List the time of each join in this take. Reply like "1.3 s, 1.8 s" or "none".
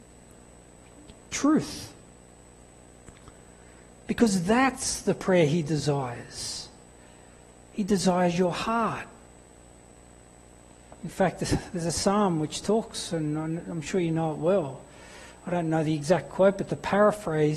none